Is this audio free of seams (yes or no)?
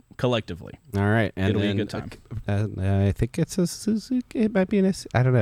no